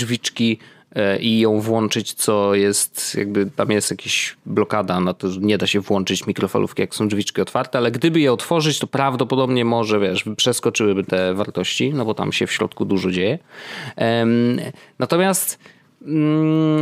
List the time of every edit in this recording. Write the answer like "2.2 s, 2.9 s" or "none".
none